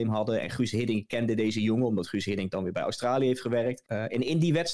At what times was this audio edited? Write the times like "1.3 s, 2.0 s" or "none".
3.8 s